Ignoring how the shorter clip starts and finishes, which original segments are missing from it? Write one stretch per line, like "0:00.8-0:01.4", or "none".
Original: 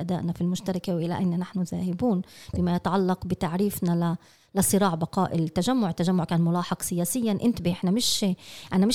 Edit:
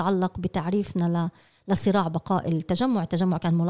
none